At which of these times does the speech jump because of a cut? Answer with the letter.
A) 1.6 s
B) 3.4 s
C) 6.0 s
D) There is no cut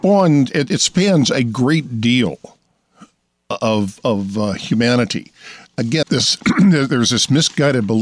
C